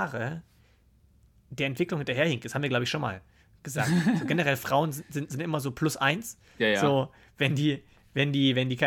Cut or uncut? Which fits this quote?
uncut